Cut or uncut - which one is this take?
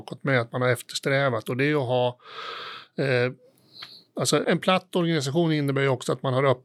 cut